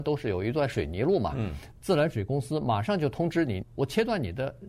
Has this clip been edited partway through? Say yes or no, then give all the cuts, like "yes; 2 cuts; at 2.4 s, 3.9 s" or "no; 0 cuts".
yes; 2 cuts; at 1.7 s, 3.6 s